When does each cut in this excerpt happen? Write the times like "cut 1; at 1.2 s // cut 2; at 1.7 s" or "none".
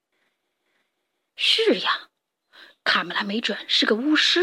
none